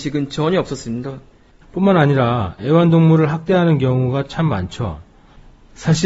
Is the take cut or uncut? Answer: cut